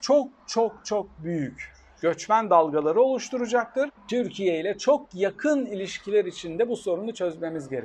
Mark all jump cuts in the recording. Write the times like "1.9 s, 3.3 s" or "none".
4.0 s